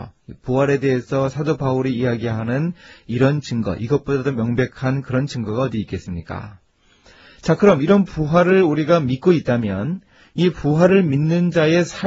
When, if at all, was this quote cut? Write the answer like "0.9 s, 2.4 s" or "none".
none